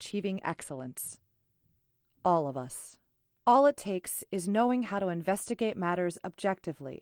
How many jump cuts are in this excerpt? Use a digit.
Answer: 1